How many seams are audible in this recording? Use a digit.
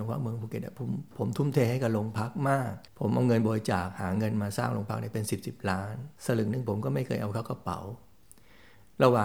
2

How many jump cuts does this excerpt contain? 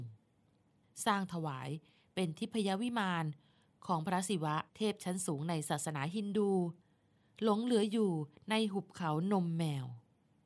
1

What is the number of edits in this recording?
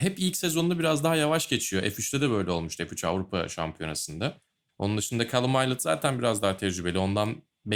1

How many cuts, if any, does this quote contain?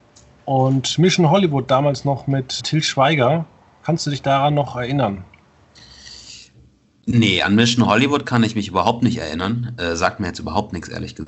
1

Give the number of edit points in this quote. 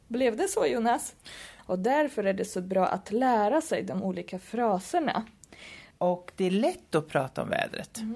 2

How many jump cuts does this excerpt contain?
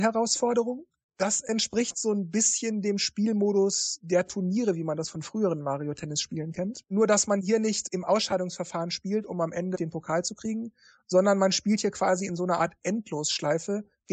0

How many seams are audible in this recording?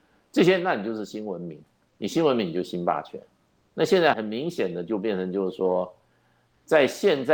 1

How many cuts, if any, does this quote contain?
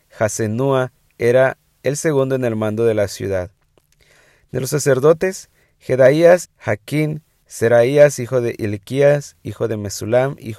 1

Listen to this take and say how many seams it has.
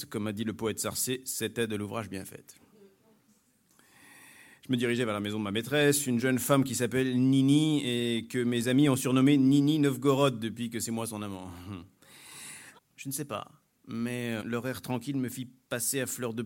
2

